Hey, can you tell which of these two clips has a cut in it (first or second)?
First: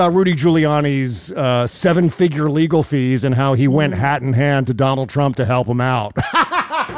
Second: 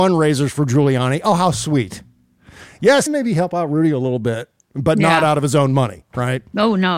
second